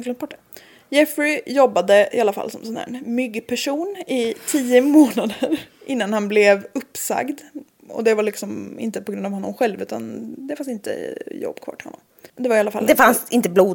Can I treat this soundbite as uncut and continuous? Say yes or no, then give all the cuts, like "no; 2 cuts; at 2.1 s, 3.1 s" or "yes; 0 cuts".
no; 1 cut; at 12.3 s